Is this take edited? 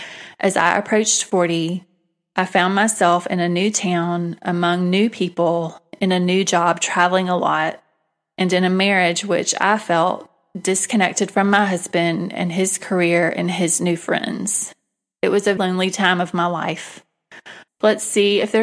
yes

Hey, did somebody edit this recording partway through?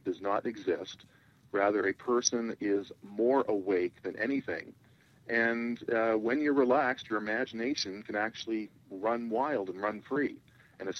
no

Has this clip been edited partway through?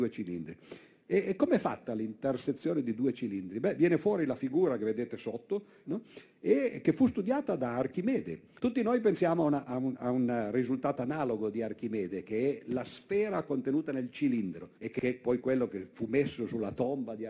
yes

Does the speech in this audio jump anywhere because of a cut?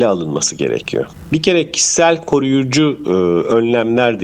no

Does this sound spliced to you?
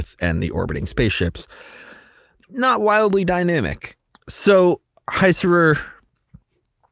no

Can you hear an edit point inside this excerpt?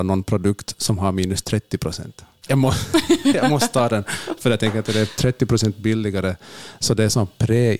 yes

